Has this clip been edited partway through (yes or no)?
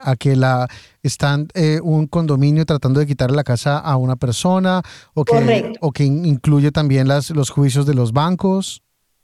no